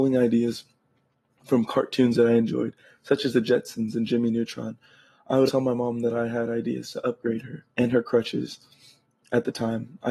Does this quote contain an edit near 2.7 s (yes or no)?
no